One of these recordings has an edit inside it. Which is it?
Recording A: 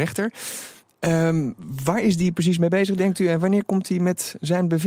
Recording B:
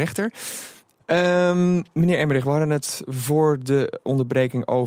B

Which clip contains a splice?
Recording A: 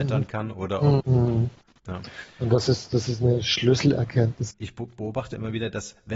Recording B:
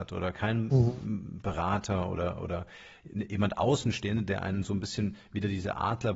A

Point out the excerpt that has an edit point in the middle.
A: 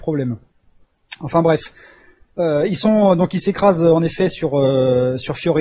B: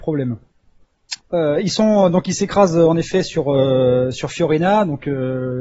B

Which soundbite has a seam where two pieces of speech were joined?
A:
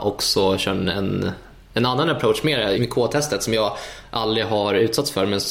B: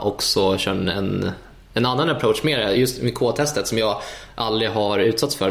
A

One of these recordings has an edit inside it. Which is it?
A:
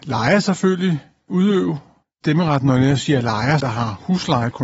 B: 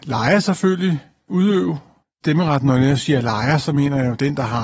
A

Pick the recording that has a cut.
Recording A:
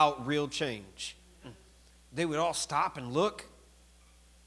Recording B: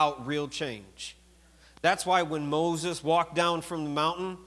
A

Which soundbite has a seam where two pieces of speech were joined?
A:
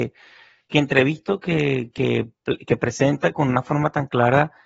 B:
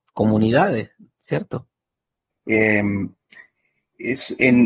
B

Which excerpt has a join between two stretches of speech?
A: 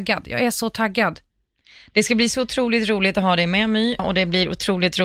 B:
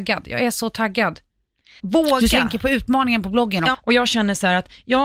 B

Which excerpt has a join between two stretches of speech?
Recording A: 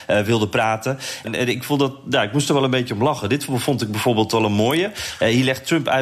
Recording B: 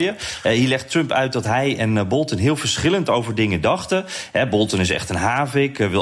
A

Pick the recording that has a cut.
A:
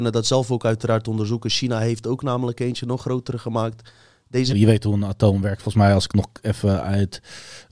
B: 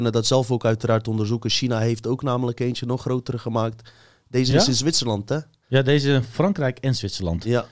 A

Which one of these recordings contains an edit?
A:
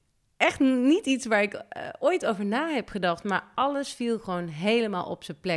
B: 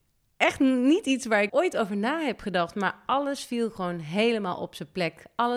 B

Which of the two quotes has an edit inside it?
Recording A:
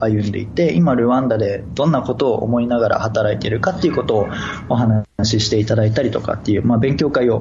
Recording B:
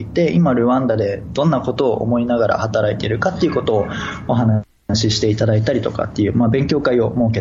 A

